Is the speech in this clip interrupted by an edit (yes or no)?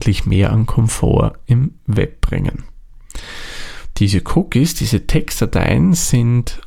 no